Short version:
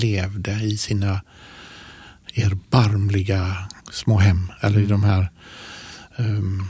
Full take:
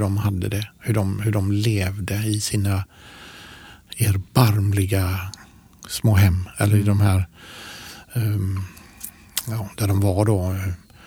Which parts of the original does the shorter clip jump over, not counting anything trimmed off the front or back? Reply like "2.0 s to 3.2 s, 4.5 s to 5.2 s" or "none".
5.4 s to 5.8 s